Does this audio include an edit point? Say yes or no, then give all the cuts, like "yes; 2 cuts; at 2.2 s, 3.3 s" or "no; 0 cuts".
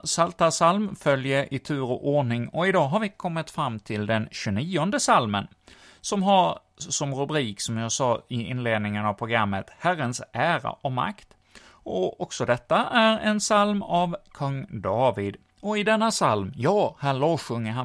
no; 0 cuts